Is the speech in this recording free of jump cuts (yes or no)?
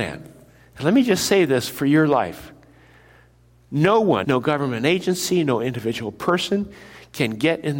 no